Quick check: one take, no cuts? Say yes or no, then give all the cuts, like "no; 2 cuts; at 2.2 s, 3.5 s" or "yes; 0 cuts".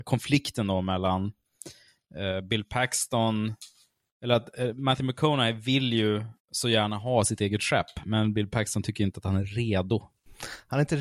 no; 1 cut; at 6.4 s